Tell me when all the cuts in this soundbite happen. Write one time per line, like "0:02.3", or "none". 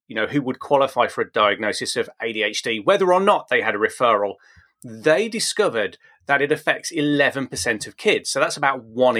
none